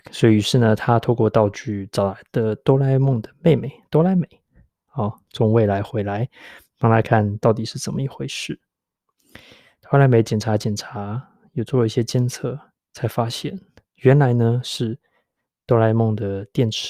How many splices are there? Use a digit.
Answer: 1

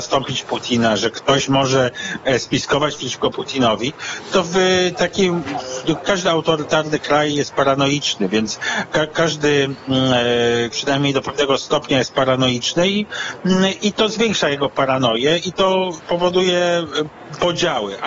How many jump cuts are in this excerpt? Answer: 2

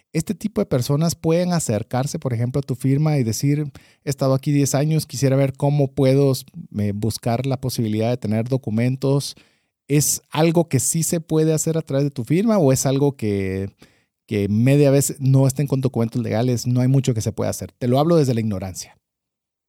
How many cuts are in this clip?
0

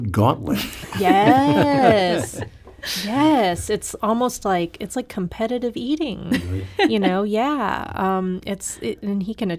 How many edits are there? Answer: 0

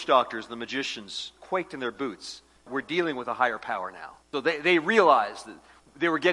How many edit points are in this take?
2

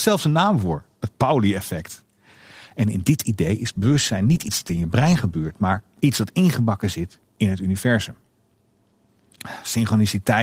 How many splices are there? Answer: 1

